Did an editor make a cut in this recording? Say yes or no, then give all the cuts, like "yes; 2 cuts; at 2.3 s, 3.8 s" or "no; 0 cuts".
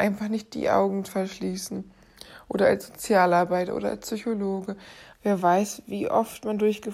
yes; 1 cut; at 5.1 s